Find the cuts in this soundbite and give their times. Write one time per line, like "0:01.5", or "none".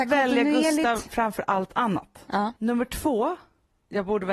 0:02.6

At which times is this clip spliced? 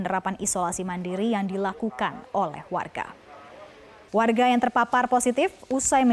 0:04.1

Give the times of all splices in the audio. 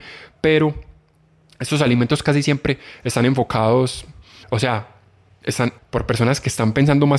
0:04.4
0:05.8

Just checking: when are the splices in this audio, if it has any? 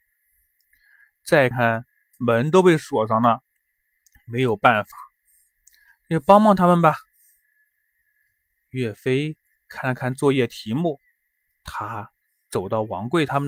0:01.5
0:11.5

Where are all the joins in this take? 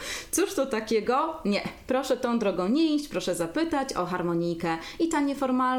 none

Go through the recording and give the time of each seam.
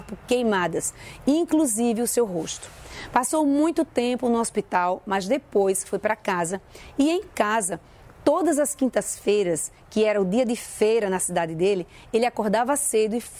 none

